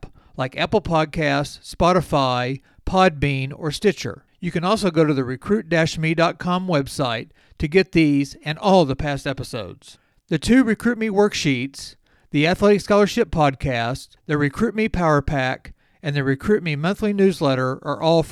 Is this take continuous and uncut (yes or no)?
yes